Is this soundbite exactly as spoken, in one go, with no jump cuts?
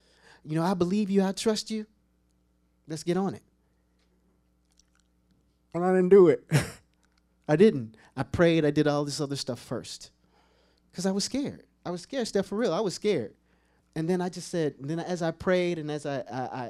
yes; 0 cuts

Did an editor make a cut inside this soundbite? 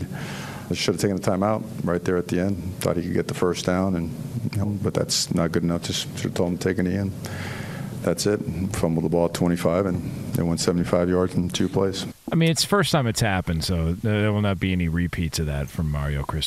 yes; 2 cuts; at 4.6 s, 12.1 s

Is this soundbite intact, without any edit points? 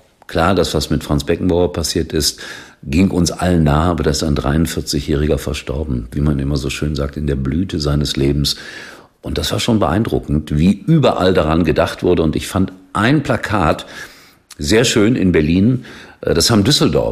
yes; 0 cuts

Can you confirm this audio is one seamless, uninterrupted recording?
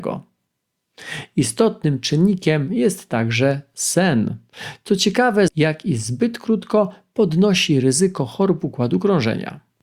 no; 1 cut; at 5.5 s

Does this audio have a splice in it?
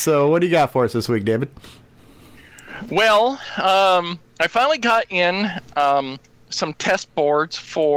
no; 0 cuts

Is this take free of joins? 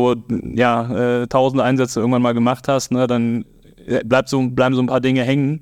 yes; 0 cuts

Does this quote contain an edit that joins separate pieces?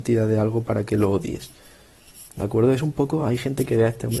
no; 0 cuts

